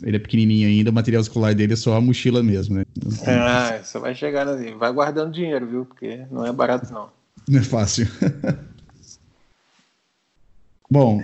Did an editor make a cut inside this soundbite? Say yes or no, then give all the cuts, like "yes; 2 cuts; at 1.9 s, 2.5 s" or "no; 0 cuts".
yes; 1 cut; at 2.8 s